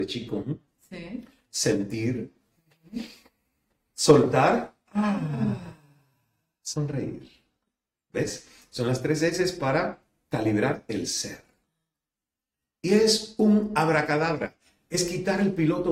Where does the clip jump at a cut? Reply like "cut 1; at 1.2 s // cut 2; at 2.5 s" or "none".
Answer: none

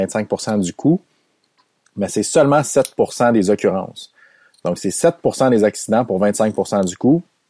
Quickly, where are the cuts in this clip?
none

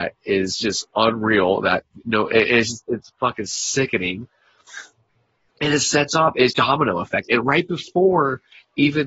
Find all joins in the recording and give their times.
cut 1; at 6.5 s

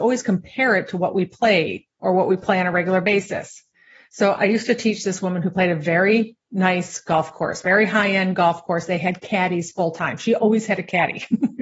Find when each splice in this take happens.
none

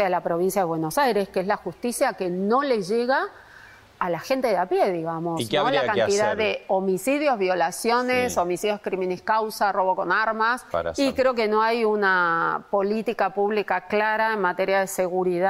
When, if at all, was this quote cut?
cut 1; at 10.7 s

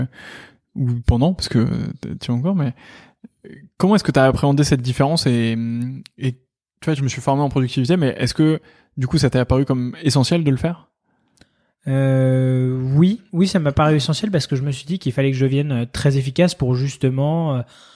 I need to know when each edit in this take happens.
cut 1; at 7.0 s

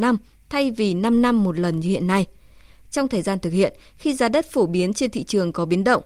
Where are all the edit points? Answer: none

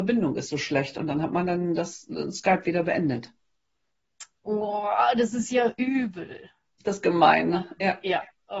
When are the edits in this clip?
cut 1; at 4.3 s

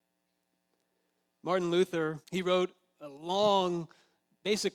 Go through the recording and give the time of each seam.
cut 1; at 2.2 s

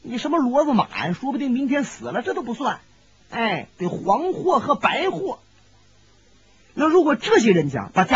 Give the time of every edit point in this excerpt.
none

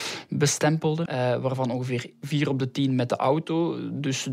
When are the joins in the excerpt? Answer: cut 1; at 1.1 s

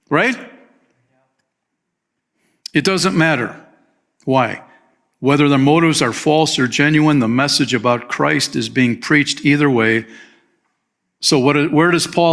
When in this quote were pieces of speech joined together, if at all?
none

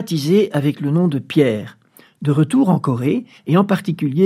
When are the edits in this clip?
cut 1; at 3.4 s

